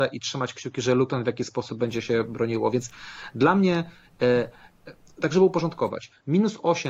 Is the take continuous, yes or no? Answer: yes